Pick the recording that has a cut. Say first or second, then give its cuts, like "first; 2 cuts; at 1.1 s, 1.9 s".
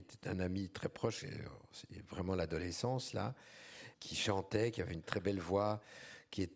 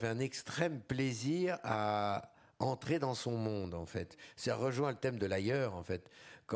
first; 2 cuts; at 3.9 s, 5.0 s